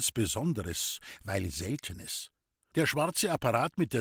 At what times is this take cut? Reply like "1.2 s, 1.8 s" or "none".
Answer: 2.7 s